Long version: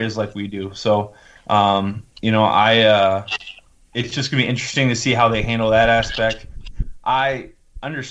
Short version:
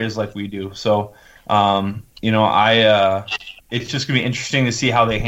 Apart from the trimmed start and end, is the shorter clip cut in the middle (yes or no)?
yes